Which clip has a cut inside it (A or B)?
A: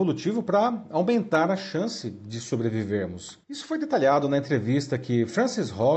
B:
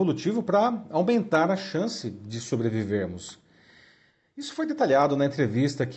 A